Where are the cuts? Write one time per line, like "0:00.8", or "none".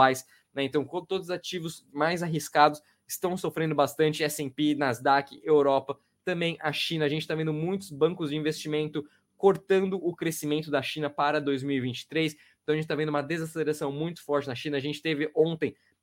none